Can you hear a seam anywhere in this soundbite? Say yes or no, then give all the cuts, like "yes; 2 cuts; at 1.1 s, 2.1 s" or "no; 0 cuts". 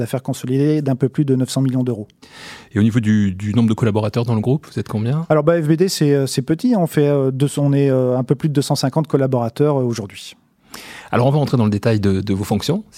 no; 0 cuts